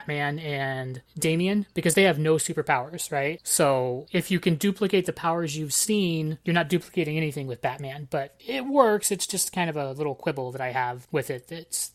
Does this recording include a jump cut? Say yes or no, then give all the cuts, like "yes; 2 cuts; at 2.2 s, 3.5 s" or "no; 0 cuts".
no; 0 cuts